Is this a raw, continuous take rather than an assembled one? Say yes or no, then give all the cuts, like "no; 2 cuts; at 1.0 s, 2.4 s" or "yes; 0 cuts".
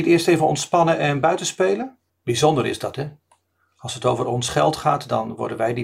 no; 1 cut; at 2.1 s